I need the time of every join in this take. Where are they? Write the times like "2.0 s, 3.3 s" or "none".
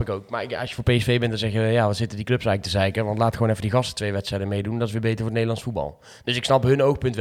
none